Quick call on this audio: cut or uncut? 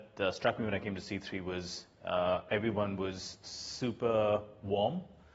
uncut